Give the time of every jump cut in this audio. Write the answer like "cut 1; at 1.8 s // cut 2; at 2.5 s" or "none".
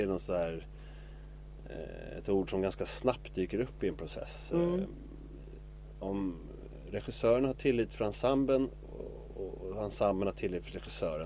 none